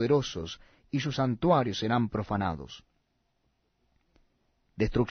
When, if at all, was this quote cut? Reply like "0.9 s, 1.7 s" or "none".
none